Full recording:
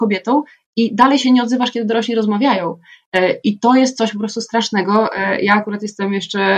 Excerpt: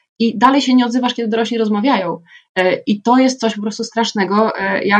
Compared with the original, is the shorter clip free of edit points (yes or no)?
yes